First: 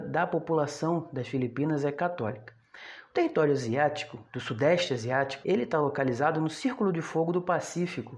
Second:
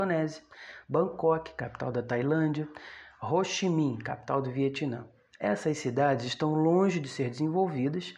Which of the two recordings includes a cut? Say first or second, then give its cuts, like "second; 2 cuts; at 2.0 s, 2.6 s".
first; 1 cut; at 5.4 s